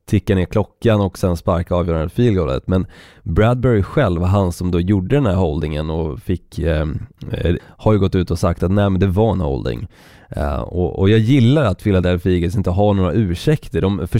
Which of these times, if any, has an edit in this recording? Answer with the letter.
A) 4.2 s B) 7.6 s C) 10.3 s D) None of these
B